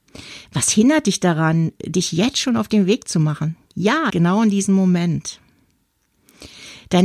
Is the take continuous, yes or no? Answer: no